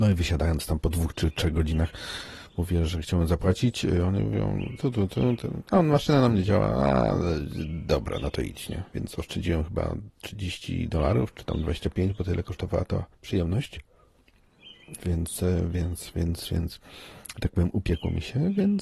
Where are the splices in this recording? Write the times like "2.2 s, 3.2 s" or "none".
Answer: 13.1 s